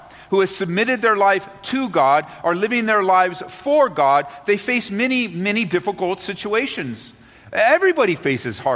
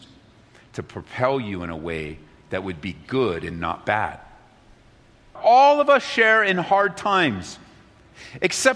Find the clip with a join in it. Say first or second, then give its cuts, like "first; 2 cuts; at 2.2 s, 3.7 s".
second; 1 cut; at 5.4 s